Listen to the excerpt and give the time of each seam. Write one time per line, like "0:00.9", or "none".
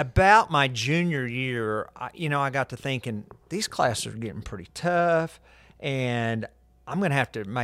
none